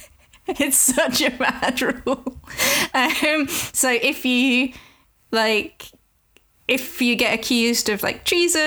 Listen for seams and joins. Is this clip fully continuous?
yes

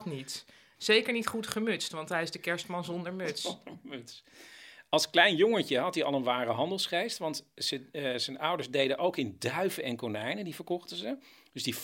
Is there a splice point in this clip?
no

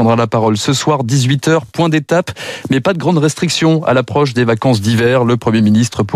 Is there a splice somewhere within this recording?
no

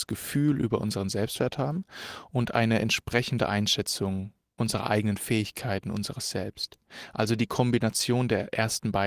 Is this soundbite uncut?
yes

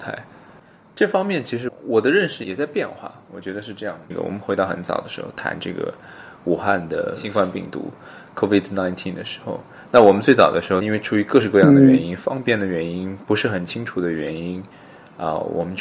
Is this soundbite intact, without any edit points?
yes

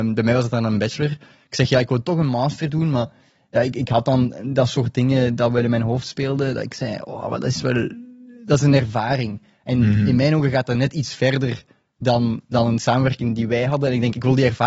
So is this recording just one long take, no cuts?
yes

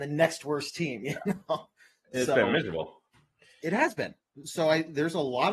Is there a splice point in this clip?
no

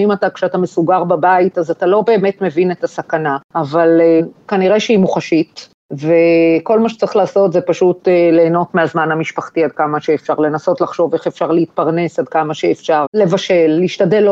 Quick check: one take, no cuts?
no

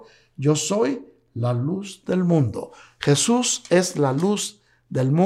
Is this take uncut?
yes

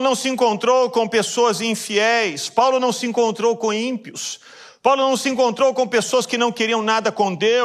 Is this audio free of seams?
yes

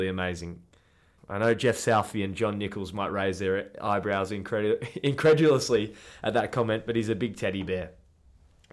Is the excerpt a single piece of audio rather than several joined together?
no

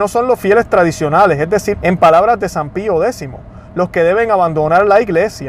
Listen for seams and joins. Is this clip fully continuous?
no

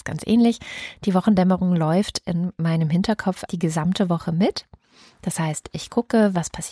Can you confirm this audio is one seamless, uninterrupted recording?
no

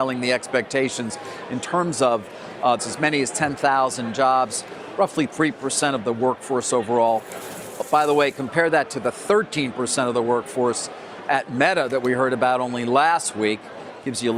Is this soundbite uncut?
no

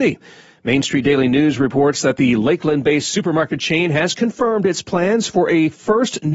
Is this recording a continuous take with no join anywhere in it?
yes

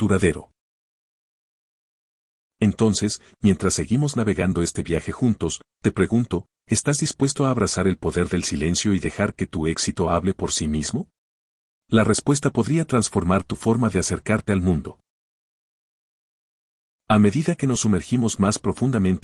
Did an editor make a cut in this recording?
no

